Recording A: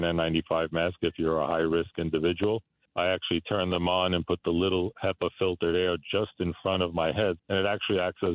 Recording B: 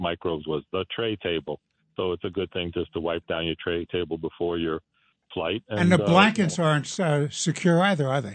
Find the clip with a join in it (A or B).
A